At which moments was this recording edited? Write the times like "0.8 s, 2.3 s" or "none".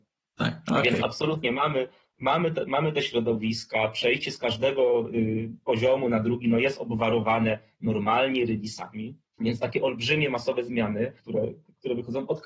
9.3 s, 11.2 s

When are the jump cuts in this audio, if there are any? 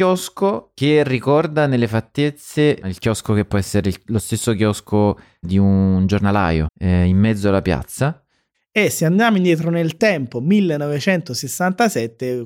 5.4 s, 6.7 s, 8.5 s

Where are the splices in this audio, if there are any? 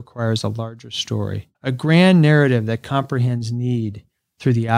1.5 s

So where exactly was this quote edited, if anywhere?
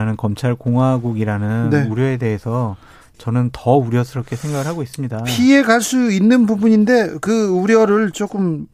none

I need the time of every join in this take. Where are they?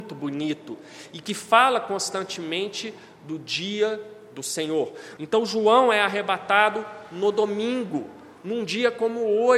5.2 s

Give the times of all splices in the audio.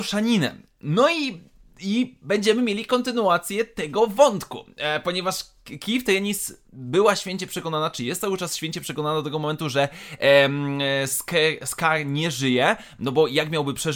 none

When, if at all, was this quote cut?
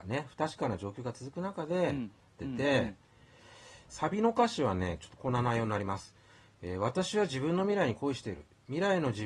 2.4 s

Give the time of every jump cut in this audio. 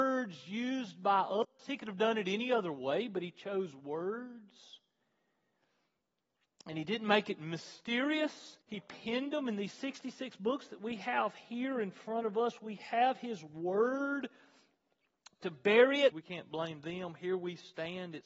8.6 s, 16.1 s

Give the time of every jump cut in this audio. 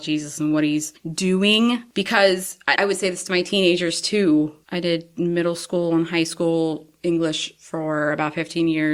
2.8 s, 4.6 s

